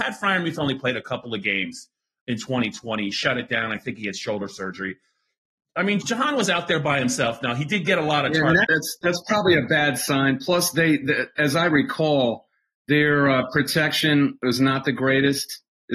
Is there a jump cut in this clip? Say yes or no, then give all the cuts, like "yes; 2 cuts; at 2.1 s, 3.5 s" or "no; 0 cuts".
yes; 2 cuts; at 6.0 s, 8.6 s